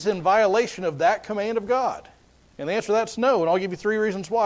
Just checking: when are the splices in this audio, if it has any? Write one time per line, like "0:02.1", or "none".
none